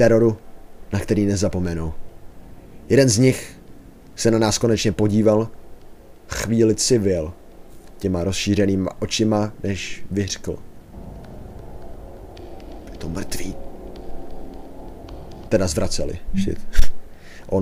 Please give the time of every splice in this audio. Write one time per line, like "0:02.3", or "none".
0:15.5